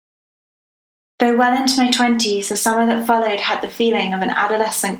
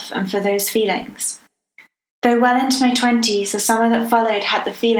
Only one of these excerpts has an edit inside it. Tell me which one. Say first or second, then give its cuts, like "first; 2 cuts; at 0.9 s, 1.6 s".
second; 1 cut; at 2.1 s